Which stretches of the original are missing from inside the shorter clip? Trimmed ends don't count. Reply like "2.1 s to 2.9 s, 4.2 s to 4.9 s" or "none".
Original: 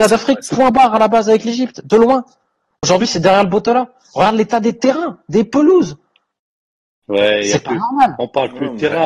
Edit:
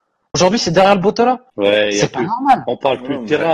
4.0 s to 7.0 s